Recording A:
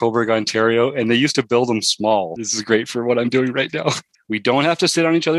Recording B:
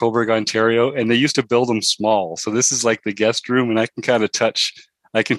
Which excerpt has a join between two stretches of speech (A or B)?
A